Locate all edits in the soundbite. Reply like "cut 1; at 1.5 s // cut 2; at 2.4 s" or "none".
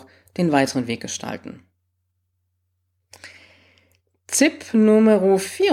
none

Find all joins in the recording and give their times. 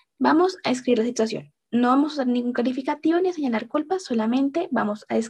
none

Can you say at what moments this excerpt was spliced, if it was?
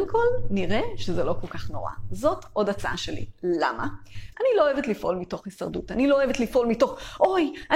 cut 1; at 4.3 s

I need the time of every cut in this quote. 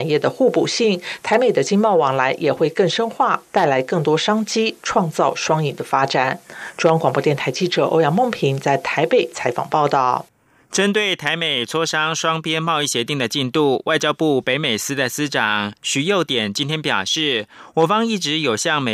none

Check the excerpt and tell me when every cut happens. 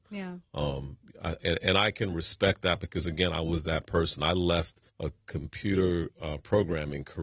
cut 1; at 1.4 s // cut 2; at 4.9 s

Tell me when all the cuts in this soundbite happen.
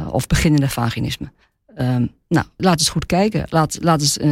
cut 1; at 2.6 s

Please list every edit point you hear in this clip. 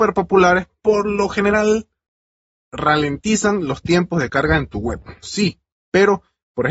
cut 1; at 5.2 s

